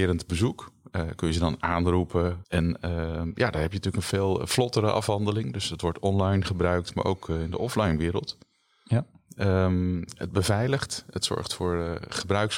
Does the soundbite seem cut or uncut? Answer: uncut